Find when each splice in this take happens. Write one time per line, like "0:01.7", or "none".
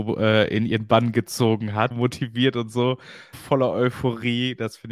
0:01.9
0:03.3